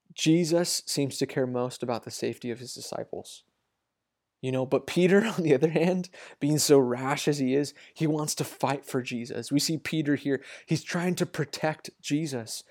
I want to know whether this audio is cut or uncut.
uncut